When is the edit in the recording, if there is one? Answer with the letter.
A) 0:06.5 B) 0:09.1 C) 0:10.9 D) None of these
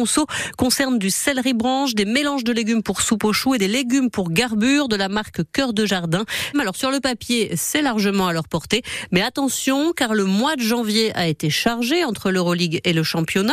A